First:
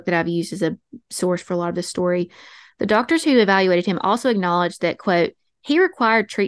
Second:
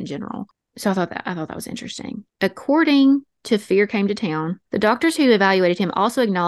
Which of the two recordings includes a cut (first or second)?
second